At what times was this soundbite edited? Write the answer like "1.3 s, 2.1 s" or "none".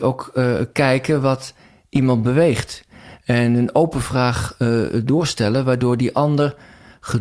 none